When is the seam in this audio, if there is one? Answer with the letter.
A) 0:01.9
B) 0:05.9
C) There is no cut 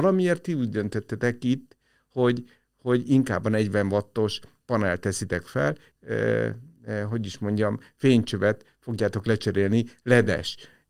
B